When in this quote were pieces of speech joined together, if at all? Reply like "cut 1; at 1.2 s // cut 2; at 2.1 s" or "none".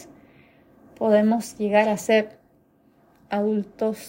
none